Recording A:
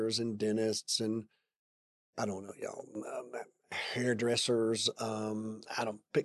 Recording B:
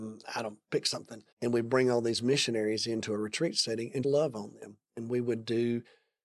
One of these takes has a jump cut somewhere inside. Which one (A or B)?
B